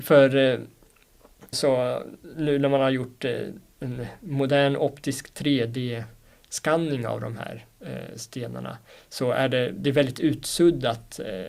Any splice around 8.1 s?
no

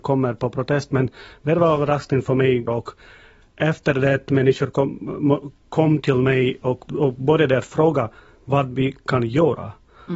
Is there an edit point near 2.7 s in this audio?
yes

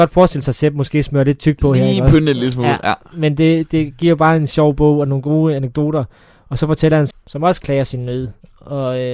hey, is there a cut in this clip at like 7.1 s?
yes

